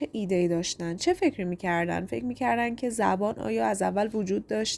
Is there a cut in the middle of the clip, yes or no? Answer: yes